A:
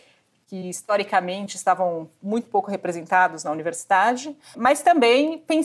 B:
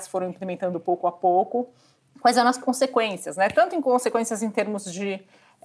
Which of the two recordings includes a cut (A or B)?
A